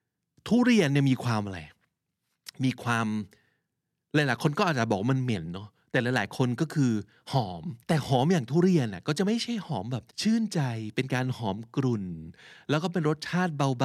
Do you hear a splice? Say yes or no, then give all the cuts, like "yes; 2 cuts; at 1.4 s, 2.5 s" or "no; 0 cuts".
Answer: yes; 2 cuts; at 7.8 s, 10.1 s